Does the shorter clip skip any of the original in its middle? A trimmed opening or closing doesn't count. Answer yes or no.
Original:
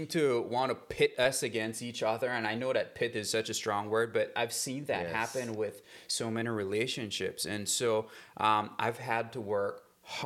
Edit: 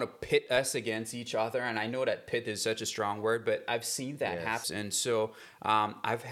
yes